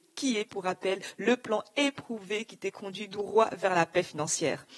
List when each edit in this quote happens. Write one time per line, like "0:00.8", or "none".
none